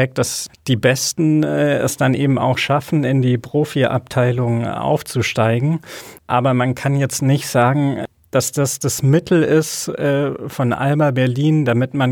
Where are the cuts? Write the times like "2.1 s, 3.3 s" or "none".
6.2 s